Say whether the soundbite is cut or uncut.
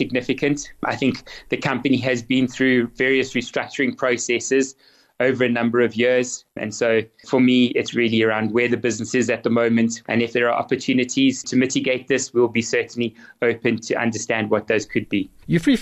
cut